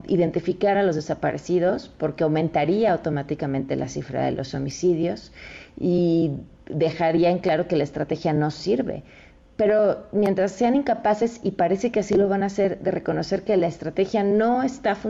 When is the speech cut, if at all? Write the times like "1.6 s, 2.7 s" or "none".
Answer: none